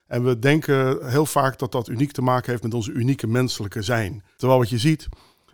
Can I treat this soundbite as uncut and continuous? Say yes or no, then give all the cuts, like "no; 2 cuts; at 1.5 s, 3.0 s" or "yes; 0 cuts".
no; 1 cut; at 4.4 s